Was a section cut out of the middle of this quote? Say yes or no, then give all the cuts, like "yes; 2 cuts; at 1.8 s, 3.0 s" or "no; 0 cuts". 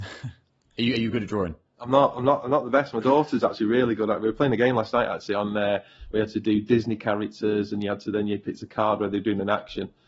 no; 0 cuts